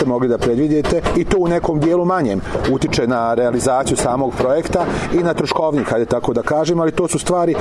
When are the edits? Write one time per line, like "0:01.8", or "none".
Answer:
none